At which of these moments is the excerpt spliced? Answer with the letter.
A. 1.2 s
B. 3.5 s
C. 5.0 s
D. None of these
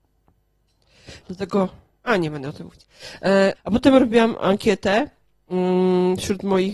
B